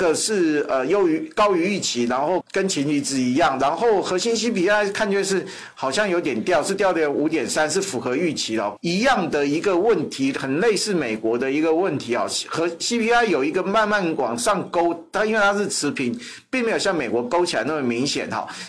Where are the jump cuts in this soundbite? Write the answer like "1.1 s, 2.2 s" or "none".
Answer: 2.4 s, 8.8 s